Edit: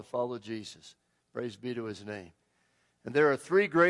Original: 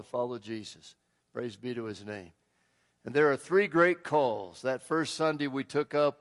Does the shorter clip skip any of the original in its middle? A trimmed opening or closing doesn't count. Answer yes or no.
no